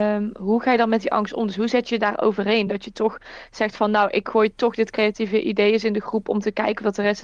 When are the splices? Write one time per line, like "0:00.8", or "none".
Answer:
none